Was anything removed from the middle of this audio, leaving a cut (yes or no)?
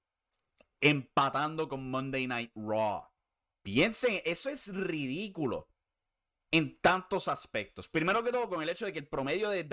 yes